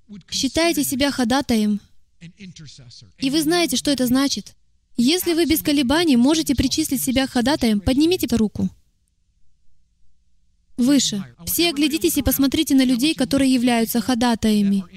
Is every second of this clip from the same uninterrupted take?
no; 2 cuts; at 8.3 s, 11.3 s

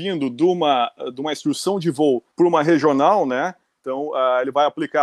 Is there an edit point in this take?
yes; 2 cuts; at 2.3 s, 3.8 s

